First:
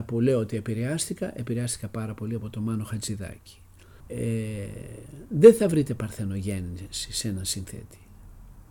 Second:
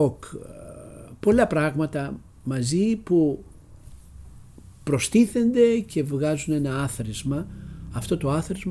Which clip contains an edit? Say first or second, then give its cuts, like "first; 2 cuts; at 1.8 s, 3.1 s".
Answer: first; 1 cut; at 4.0 s